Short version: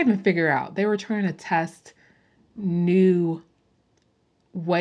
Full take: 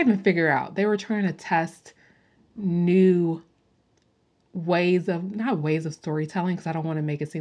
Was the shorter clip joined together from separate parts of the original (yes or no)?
no